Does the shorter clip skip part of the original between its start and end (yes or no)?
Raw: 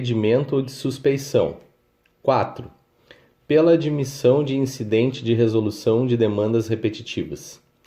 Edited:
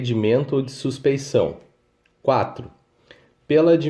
no